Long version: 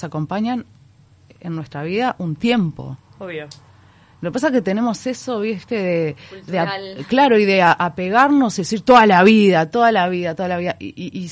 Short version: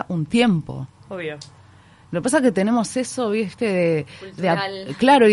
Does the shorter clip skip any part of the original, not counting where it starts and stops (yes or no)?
no